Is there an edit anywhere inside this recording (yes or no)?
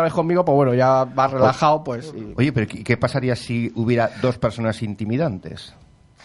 no